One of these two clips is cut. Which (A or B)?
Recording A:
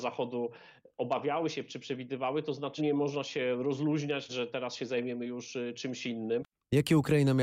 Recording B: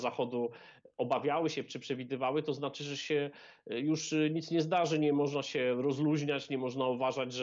A